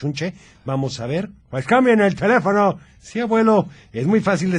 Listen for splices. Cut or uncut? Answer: cut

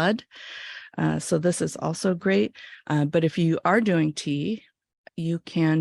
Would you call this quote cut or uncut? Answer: cut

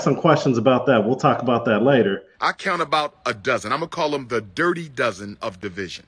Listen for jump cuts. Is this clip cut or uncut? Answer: cut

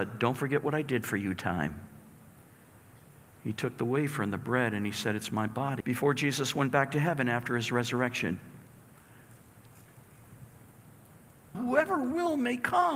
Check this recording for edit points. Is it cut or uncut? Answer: cut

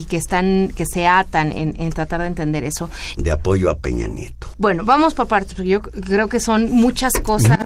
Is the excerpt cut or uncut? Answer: cut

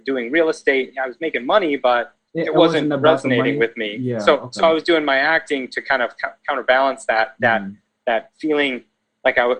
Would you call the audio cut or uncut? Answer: uncut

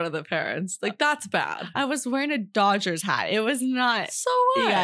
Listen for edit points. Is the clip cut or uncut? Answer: uncut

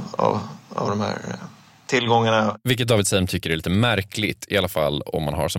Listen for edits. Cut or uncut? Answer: uncut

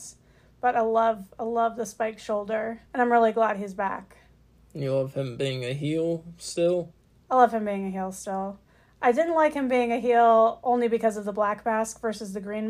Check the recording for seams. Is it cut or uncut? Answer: cut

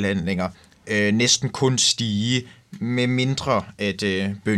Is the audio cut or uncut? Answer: uncut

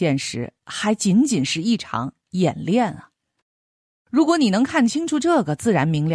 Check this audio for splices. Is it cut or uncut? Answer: uncut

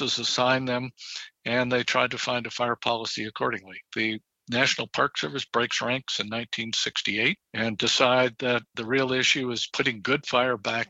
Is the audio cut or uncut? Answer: uncut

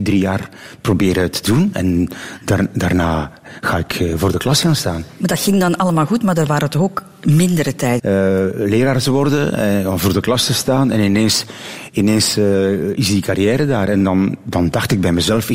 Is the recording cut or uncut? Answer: cut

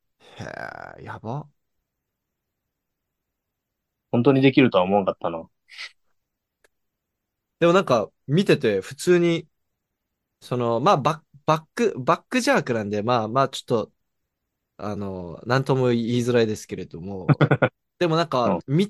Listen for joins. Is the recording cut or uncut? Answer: uncut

